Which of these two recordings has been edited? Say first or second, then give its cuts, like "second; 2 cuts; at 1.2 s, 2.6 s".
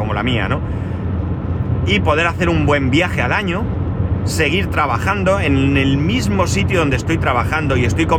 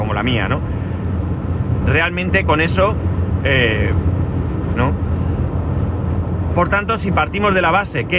second; 2 cuts; at 1.8 s, 4.8 s